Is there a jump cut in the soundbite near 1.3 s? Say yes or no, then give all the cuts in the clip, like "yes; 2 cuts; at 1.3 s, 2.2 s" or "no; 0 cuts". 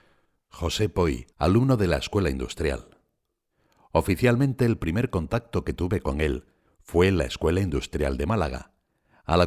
yes; 1 cut; at 1.3 s